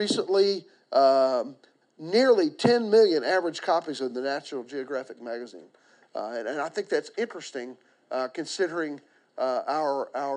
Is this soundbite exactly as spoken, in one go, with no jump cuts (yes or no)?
no